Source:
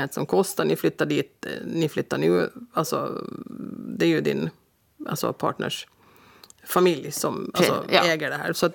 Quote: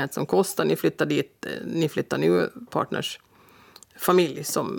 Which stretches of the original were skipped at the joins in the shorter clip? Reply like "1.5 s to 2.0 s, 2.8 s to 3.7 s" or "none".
2.7 s to 5.3 s